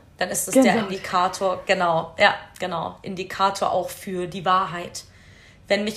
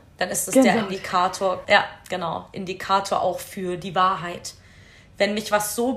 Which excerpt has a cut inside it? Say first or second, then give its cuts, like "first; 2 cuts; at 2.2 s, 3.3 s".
second; 1 cut; at 1.6 s